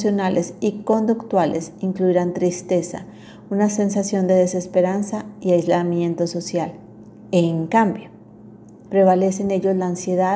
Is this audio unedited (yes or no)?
no